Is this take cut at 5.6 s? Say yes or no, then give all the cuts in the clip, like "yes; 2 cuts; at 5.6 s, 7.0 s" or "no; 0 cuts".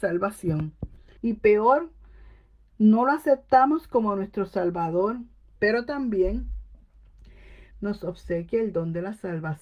yes; 3 cuts; at 1.2 s, 5.6 s, 7.7 s